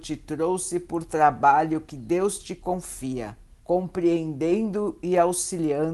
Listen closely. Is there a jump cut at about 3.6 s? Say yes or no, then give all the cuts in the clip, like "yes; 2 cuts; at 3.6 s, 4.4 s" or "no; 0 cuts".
yes; 1 cut; at 3.6 s